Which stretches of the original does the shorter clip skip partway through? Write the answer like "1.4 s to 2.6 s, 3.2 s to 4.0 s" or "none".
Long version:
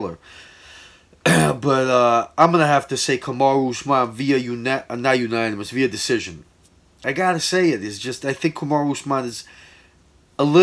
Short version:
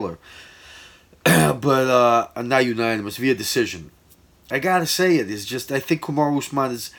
2.3 s to 4.9 s

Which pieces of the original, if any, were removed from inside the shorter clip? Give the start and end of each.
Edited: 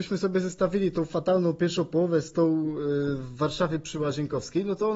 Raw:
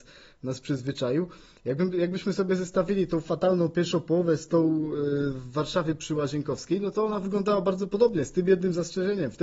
none

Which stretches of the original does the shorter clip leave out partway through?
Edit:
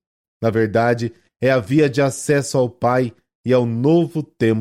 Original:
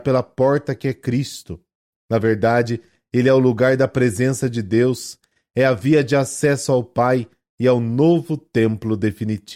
3.0 s to 5.4 s

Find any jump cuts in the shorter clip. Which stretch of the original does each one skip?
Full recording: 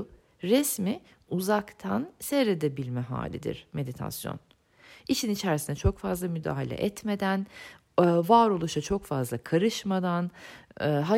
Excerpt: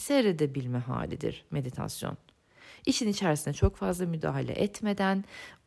none

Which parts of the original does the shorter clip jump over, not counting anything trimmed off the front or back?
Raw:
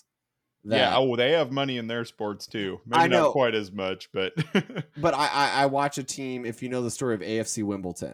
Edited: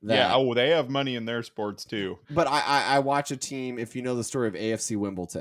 2.8 s to 4.9 s

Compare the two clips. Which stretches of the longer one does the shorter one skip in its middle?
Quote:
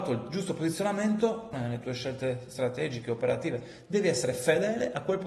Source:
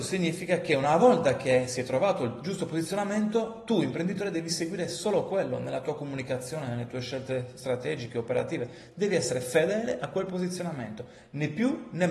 3.7 s to 6.6 s

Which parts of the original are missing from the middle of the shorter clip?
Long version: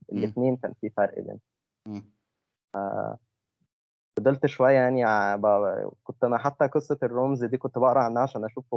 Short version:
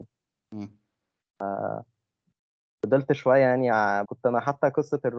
5.4 s to 6.0 s

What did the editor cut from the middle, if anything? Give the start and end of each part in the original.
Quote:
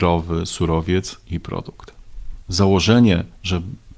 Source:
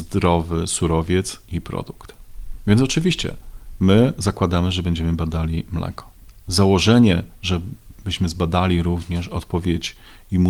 2.6 s to 6.4 s

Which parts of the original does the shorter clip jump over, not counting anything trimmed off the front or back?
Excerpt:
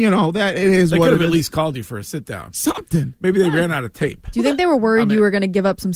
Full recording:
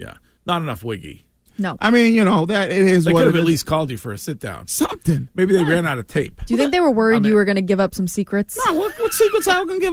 none

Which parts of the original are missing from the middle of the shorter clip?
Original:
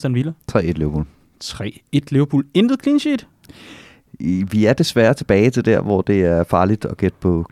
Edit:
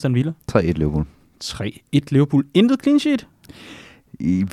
none

